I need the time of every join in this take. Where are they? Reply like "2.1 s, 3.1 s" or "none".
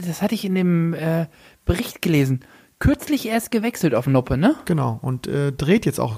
none